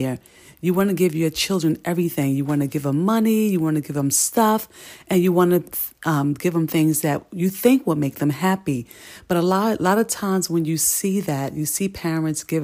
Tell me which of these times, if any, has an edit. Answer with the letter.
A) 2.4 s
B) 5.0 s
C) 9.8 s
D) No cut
D